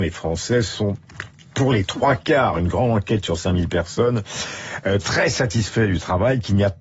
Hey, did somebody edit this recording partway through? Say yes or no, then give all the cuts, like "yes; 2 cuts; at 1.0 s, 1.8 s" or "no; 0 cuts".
no; 0 cuts